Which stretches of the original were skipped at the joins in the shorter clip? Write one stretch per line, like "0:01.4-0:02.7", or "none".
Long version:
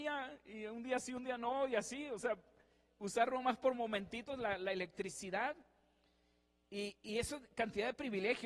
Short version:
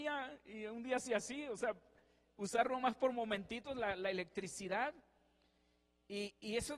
0:01.1-0:01.7